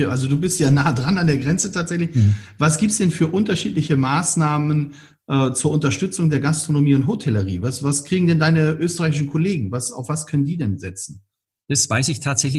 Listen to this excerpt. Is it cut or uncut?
uncut